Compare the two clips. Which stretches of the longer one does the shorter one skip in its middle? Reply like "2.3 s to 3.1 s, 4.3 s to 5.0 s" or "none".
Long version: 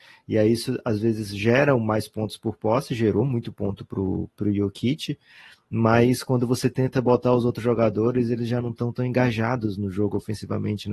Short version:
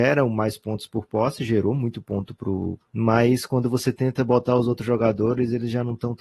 4.3 s to 5.6 s

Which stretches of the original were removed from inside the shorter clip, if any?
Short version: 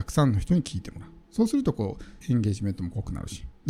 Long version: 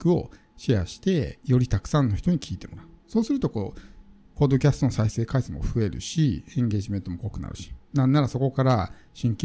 4.0 s to 6.5 s

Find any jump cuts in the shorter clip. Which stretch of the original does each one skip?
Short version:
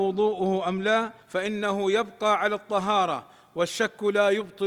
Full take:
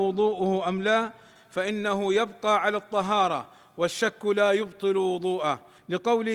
1.2 s to 1.4 s

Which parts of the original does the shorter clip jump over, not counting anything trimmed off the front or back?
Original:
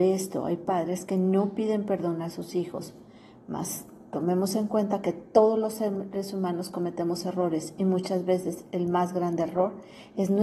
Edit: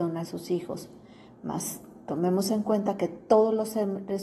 none

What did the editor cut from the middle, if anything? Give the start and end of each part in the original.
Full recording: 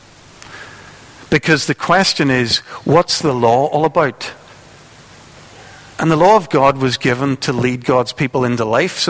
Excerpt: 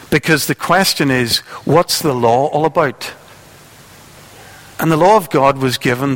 none

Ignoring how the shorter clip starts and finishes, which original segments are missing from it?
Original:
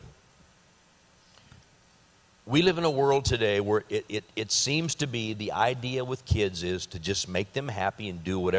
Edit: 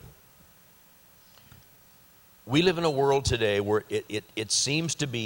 none

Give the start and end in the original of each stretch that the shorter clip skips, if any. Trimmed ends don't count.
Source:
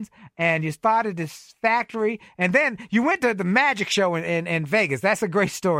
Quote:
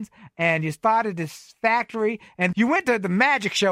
2.5 s to 2.9 s

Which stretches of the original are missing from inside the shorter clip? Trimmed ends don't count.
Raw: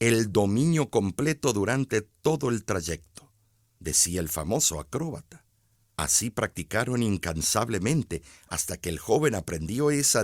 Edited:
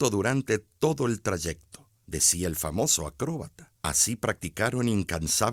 3.4 s to 3.7 s, 5.5 s to 5.9 s

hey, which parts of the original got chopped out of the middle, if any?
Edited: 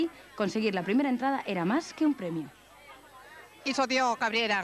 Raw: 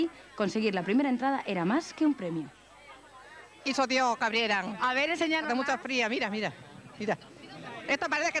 none

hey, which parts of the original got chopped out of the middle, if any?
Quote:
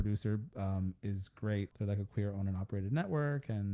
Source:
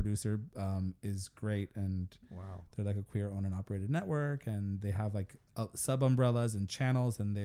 1.7 s to 2.7 s

